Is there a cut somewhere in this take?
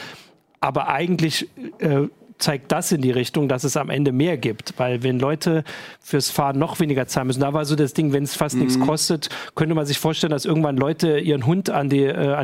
no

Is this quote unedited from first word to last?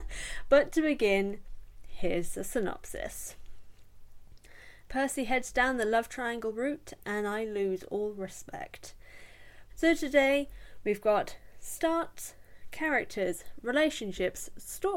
no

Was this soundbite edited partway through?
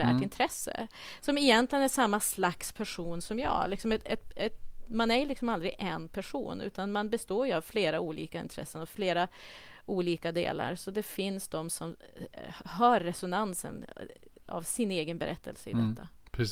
no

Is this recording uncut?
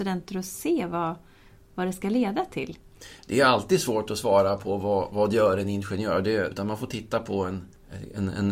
no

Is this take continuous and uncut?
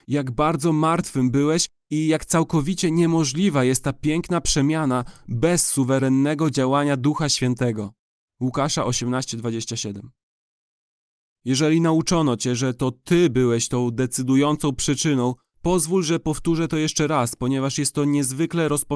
yes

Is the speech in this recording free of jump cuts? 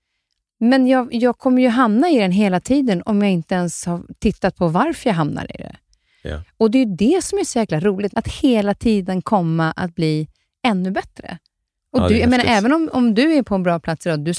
no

